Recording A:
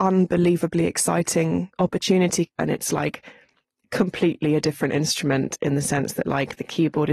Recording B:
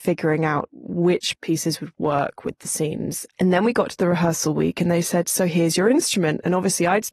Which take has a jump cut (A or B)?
A